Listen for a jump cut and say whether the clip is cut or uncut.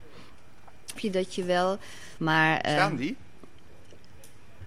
cut